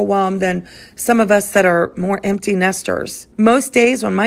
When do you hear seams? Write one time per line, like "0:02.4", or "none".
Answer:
0:03.3